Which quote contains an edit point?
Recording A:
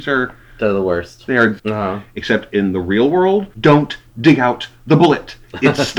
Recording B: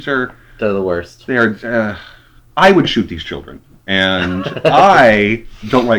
A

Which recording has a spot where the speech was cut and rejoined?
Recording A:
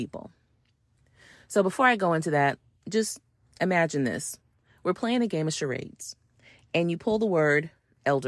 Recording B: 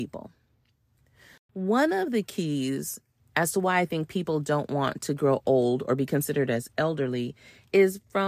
B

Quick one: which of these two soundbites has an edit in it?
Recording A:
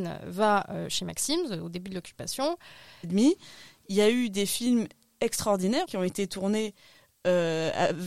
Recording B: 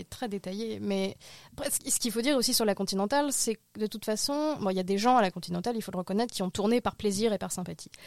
A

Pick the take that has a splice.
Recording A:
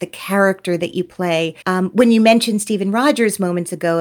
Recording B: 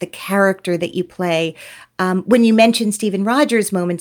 A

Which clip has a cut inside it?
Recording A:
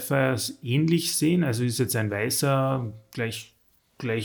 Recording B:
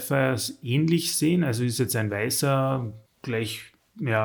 B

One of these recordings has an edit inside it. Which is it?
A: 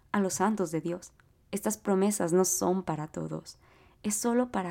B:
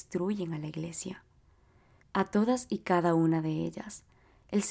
B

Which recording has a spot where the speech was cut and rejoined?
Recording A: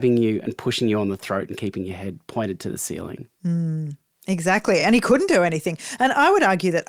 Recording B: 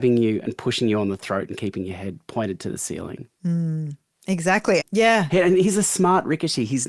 B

